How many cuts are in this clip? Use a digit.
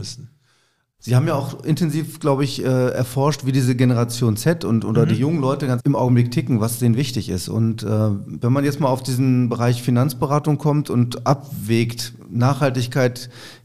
1